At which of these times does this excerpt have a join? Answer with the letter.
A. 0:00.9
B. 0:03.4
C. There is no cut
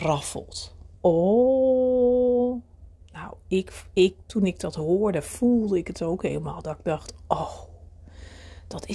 A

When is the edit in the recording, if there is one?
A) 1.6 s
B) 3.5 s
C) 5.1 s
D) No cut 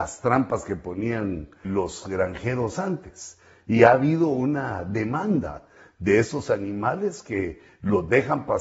A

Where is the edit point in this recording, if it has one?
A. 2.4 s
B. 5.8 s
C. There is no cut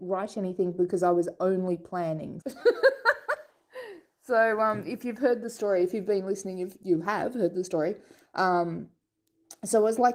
A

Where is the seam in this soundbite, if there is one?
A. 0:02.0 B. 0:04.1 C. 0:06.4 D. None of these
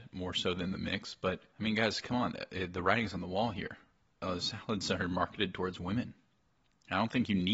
D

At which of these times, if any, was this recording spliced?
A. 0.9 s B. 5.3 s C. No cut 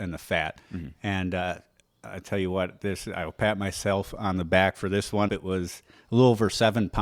B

